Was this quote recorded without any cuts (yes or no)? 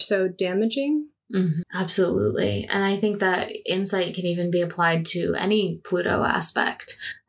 no